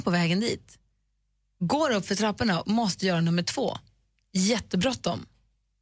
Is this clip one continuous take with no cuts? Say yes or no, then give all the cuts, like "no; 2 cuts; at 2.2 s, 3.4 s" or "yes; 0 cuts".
yes; 0 cuts